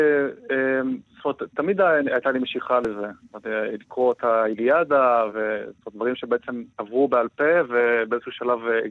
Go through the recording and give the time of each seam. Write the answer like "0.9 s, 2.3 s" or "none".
5.3 s, 6.7 s